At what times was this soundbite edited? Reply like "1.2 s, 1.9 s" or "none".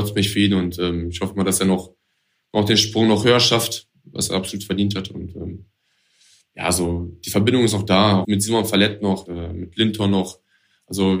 8.2 s, 9.3 s